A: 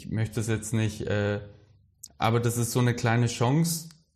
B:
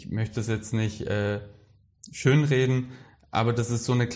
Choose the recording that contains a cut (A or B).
A